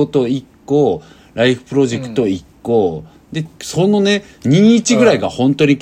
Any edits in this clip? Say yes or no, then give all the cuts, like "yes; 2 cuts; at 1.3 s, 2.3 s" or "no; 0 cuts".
yes; 1 cut; at 3.5 s